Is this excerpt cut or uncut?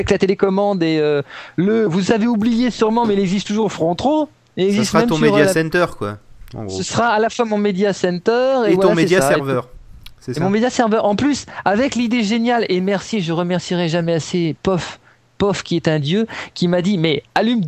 uncut